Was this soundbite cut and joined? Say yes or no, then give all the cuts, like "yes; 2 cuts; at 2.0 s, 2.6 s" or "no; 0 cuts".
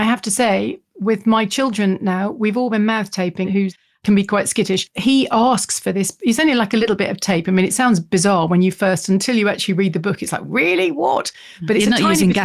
yes; 1 cut; at 3.4 s